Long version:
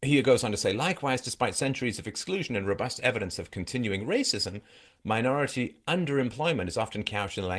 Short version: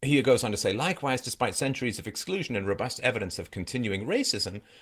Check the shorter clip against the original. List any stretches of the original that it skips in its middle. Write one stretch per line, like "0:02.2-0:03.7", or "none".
none